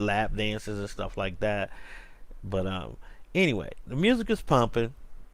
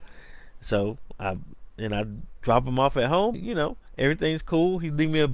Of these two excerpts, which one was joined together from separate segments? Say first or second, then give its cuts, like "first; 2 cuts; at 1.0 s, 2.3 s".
second; 1 cut; at 3.3 s